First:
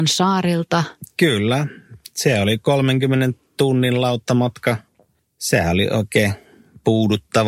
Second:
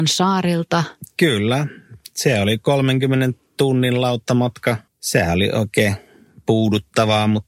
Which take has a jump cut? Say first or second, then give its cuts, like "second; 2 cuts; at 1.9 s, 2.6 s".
second; 1 cut; at 4.9 s